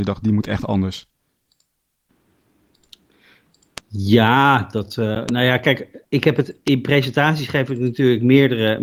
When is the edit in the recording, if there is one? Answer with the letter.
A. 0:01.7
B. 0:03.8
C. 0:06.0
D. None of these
C